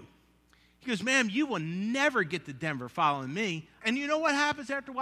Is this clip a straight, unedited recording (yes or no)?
no